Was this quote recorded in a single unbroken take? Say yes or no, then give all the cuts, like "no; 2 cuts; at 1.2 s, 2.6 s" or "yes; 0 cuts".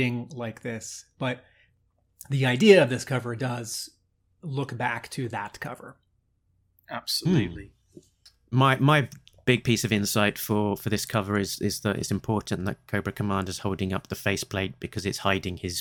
yes; 0 cuts